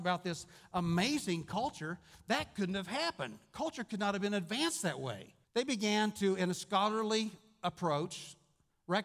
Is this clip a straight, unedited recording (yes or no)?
no